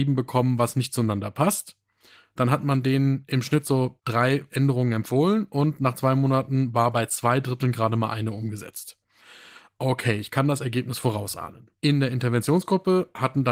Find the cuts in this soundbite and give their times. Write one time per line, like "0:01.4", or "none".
0:11.8